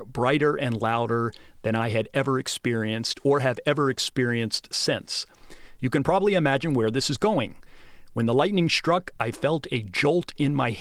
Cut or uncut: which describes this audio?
uncut